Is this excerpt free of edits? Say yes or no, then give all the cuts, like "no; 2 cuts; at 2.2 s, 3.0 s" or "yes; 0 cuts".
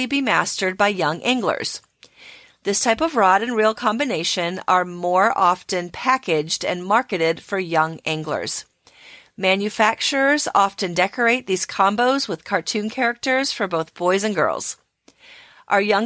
yes; 0 cuts